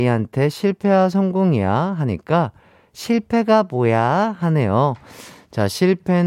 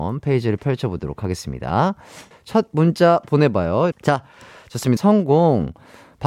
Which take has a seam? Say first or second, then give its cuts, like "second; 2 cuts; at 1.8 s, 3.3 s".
second; 3 cuts; at 2.3 s, 3.9 s, 5.0 s